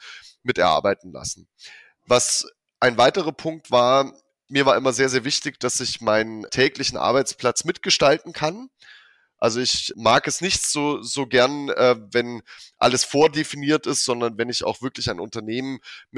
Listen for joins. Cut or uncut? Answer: uncut